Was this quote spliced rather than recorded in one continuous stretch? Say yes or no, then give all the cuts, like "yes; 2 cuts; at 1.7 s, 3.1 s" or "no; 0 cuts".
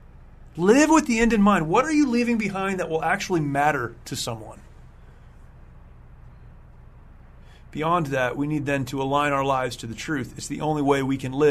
no; 0 cuts